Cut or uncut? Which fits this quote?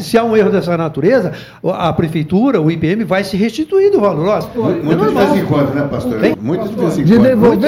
cut